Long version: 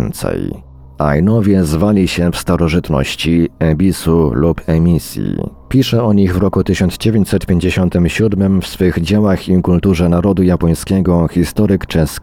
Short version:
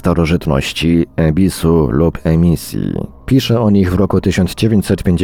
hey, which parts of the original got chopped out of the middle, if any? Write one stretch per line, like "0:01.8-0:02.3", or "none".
none